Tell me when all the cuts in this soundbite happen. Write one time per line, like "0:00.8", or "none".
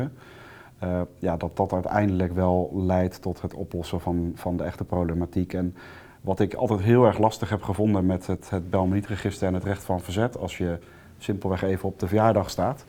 none